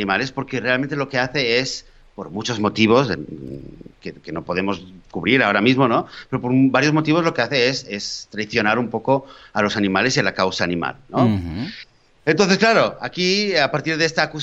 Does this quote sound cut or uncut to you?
uncut